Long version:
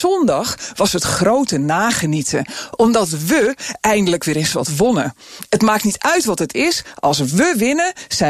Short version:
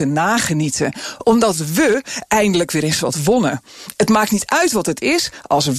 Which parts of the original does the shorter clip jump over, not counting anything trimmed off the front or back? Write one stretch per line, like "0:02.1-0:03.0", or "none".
none